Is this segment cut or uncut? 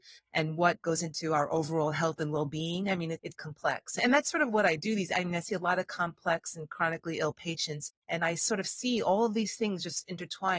cut